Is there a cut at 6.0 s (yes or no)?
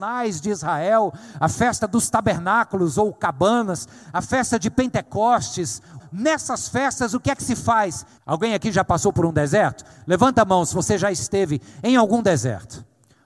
yes